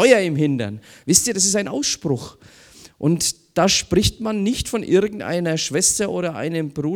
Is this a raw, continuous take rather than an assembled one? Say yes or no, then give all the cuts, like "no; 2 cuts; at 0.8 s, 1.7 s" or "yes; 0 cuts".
yes; 0 cuts